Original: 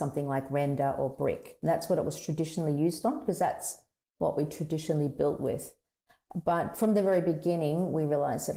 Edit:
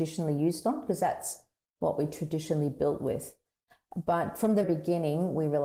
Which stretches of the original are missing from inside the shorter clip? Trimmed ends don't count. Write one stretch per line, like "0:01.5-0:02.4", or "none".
0:07.0-0:07.2